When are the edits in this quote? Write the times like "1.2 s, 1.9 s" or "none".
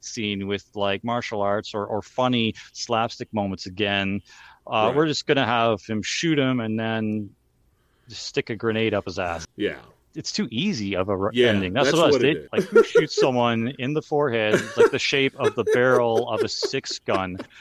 9.4 s, 12.5 s

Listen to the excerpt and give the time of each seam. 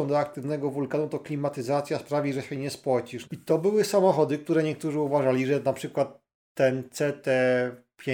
3.2 s

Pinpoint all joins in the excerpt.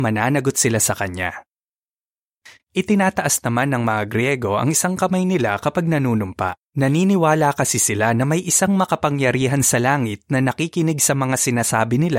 2.6 s, 6.6 s

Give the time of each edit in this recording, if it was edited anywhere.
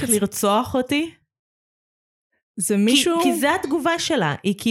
none

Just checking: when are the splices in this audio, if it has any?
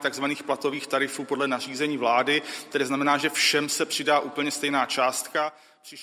none

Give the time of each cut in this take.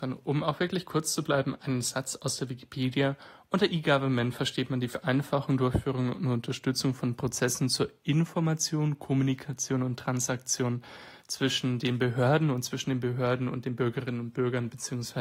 none

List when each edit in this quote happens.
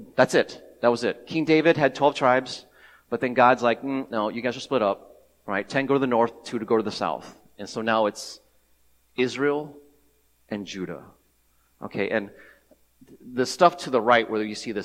none

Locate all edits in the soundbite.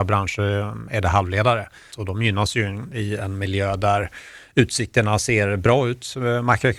1.9 s

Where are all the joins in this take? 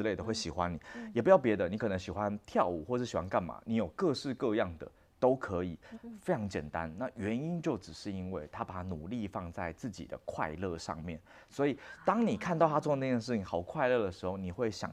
5.9 s

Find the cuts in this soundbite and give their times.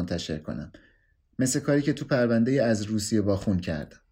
none

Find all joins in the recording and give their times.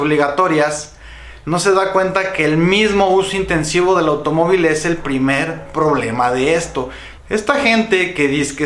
7.2 s

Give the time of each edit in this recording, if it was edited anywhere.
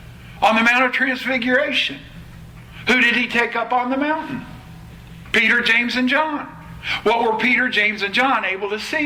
none

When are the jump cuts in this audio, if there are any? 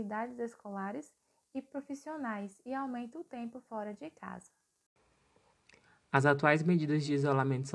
none

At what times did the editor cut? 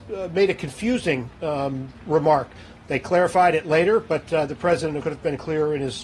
2.0 s, 5.0 s

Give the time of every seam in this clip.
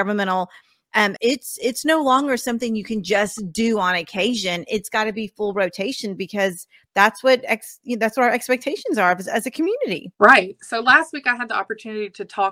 1.2 s, 10.1 s

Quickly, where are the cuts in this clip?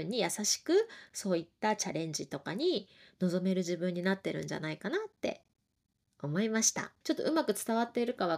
7.0 s

